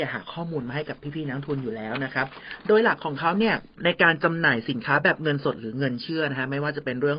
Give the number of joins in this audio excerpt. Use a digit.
1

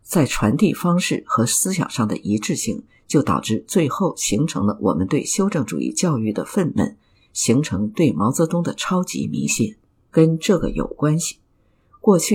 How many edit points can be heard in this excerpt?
1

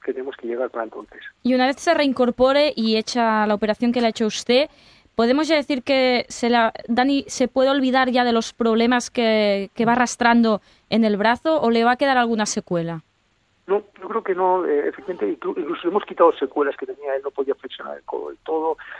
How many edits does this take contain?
0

